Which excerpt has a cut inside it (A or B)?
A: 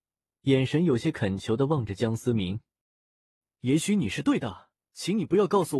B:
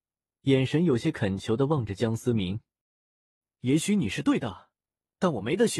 A